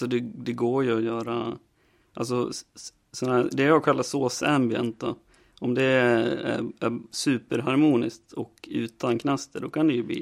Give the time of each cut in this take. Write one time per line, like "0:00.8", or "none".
none

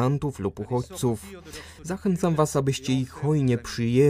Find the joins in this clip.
none

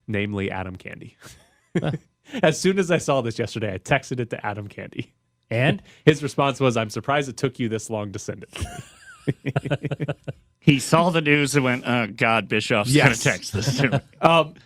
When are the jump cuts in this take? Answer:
none

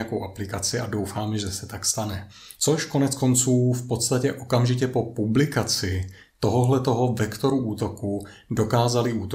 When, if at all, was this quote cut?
0:02.6

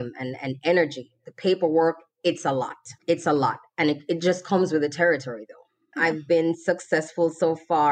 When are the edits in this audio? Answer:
0:03.0

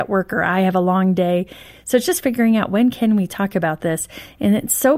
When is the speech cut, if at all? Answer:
none

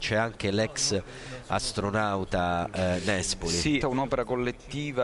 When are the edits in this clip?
0:03.8

